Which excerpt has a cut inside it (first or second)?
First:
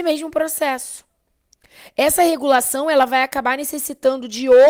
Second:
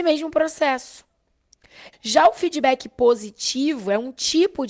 second